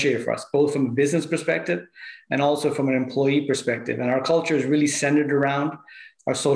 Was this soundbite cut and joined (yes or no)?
no